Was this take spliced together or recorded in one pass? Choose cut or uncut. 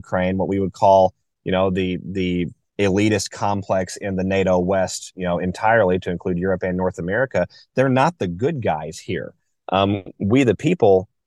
uncut